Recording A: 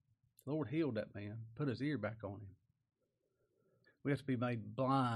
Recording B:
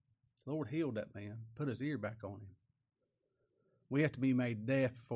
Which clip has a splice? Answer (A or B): A